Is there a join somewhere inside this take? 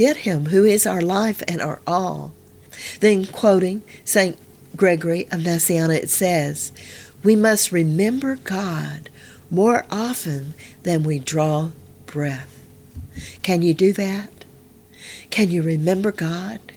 no; 0 cuts

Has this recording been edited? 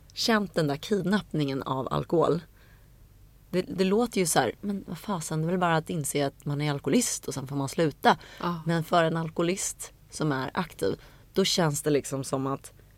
no; 0 cuts

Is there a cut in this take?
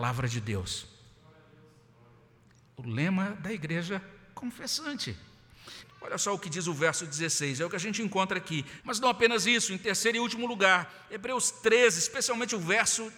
yes; 2 cuts; at 5.8 s, 8.8 s

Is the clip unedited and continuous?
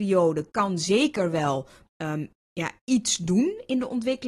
yes; 0 cuts

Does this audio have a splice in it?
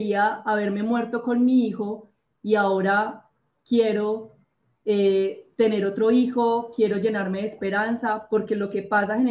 no; 0 cuts

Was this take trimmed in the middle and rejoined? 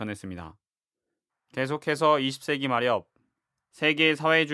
yes; 1 cut; at 1.3 s

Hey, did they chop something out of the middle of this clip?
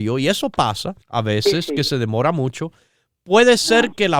yes; 1 cut; at 1.0 s

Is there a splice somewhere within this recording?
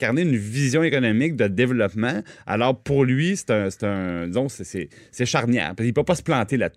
no; 0 cuts

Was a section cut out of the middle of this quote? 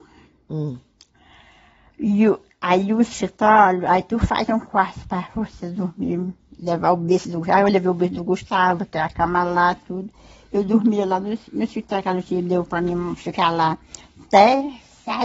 no; 0 cuts

